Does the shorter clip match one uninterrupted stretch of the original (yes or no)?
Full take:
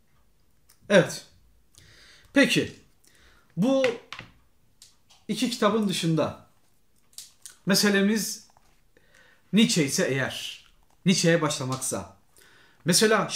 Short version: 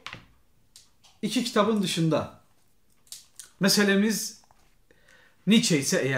yes